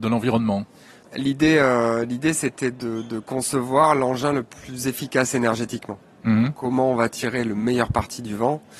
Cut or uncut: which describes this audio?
uncut